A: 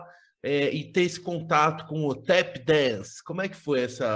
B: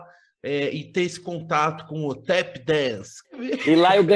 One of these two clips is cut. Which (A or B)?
B